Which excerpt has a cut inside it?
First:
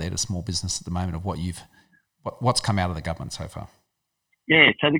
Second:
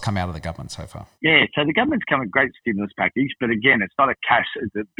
second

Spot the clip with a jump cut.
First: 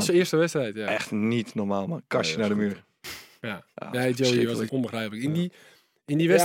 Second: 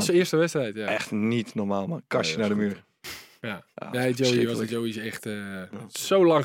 first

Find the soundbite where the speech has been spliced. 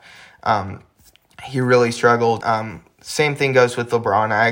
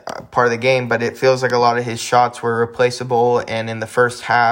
first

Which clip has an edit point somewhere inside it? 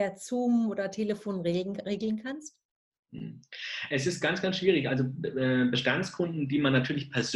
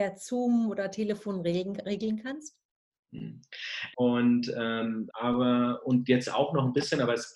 second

